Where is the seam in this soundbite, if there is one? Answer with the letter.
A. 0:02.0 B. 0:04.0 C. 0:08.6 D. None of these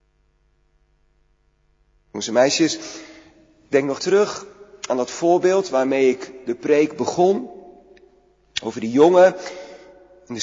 B